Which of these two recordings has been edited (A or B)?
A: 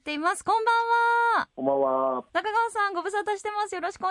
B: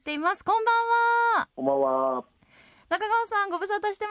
A